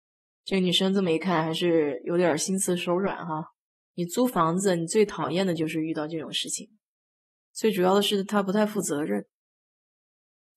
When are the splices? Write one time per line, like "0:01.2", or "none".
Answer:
0:03.7
0:07.5